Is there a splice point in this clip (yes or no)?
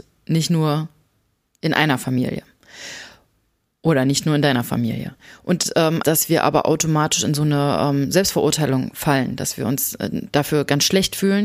yes